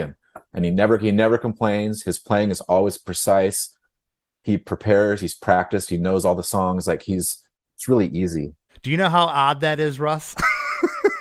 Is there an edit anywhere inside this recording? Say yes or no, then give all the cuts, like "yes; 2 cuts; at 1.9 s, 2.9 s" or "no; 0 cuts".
no; 0 cuts